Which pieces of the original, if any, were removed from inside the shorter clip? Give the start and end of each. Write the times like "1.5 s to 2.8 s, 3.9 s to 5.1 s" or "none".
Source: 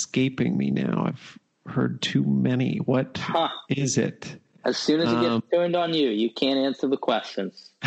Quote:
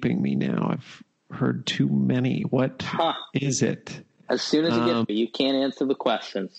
5.4 s to 6.1 s